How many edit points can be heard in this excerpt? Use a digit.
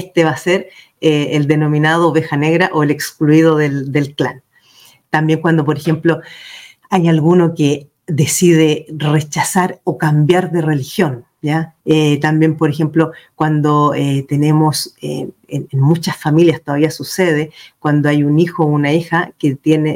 1